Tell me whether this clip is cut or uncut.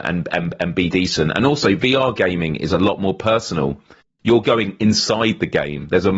uncut